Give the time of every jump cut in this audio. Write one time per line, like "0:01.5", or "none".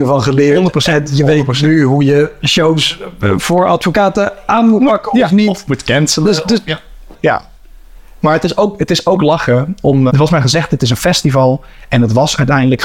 0:07.1
0:10.1